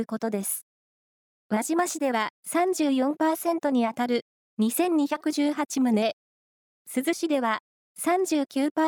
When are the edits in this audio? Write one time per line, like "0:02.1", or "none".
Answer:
0:01.4